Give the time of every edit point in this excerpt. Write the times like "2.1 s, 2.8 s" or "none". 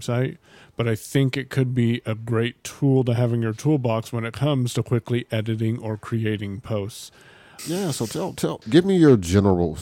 7.6 s, 8.6 s